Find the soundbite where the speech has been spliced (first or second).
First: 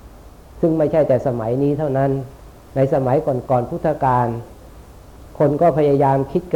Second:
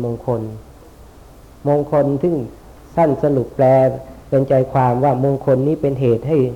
first